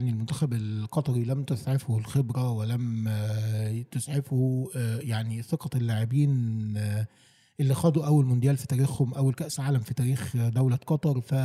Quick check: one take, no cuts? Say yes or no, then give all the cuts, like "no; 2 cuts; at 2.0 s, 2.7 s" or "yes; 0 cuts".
yes; 0 cuts